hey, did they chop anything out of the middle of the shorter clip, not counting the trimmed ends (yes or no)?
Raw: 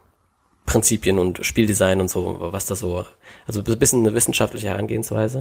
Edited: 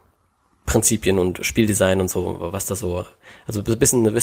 no